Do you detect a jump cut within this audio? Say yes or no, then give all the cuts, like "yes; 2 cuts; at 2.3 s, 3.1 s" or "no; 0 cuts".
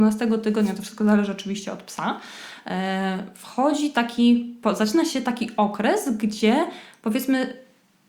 no; 0 cuts